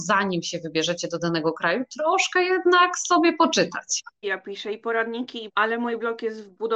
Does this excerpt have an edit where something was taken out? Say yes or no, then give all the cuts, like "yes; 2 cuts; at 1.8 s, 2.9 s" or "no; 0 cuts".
yes; 2 cuts; at 4.2 s, 5.5 s